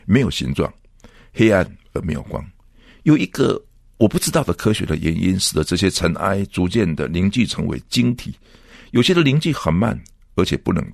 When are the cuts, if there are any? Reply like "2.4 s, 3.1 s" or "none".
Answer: none